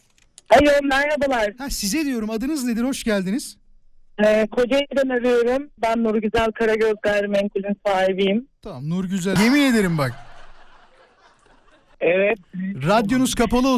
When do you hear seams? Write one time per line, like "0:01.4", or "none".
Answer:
0:05.8
0:09.4
0:11.9